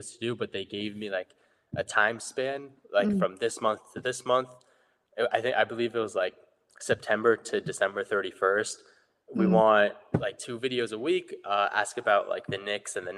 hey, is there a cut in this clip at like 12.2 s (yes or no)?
no